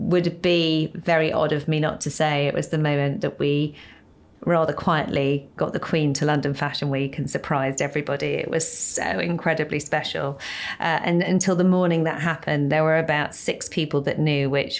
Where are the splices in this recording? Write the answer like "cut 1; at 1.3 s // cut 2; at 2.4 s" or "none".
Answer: none